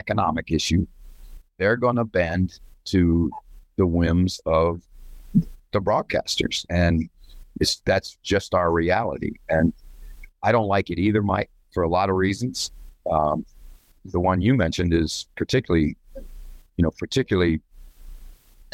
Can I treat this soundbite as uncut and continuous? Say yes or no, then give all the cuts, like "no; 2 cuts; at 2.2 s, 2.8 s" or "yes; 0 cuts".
no; 1 cut; at 14.0 s